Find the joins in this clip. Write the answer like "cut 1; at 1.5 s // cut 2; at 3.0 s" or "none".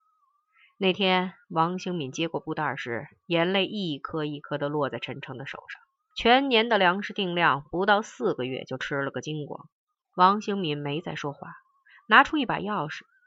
cut 1; at 6.1 s // cut 2; at 10.1 s